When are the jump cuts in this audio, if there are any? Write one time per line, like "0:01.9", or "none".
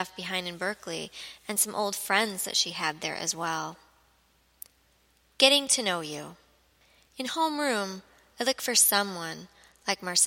none